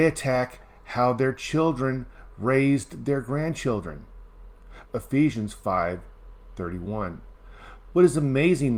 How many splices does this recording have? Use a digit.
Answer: 2